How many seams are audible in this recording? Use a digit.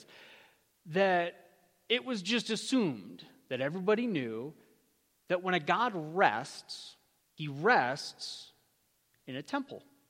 1